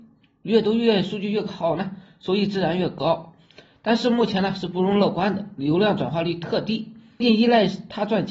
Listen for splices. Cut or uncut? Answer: cut